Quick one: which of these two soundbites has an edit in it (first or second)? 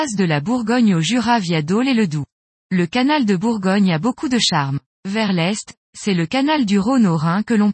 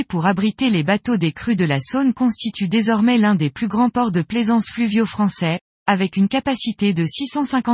first